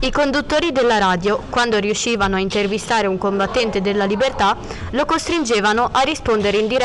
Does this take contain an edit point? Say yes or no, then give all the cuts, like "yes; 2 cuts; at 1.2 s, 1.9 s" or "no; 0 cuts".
no; 0 cuts